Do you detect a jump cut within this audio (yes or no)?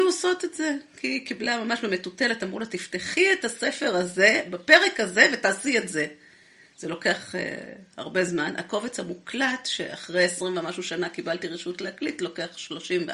yes